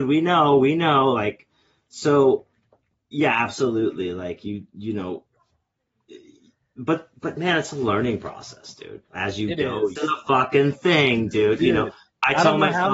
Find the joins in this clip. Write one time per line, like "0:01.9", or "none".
0:10.0